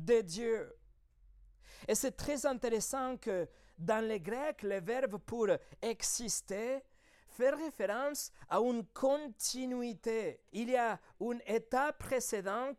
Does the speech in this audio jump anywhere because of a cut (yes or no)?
yes